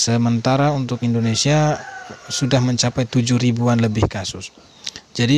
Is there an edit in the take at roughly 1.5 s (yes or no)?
no